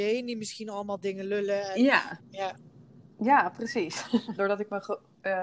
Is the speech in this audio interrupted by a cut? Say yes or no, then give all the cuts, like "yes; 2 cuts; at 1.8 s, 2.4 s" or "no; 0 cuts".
yes; 2 cuts; at 2.2 s, 4.4 s